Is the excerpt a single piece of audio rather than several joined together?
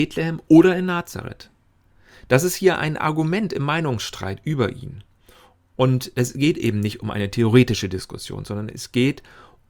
yes; 0 cuts

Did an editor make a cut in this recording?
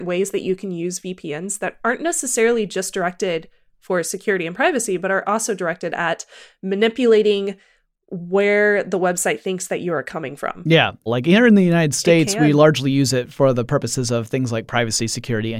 yes; 1 cut; at 11.1 s

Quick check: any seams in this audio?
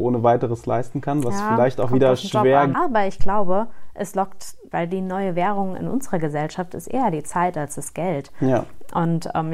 yes; 2 cuts; at 2.7 s, 4.7 s

